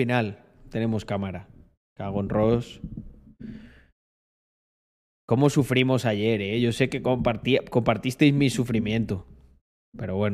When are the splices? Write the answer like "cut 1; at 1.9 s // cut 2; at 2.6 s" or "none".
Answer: none